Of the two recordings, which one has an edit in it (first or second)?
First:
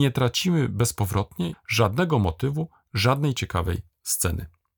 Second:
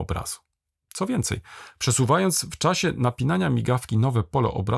first